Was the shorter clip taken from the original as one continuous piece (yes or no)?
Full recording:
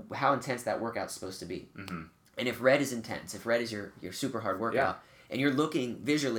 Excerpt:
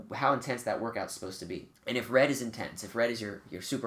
no